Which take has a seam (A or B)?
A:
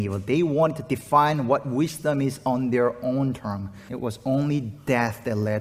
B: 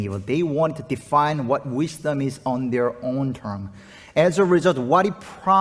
A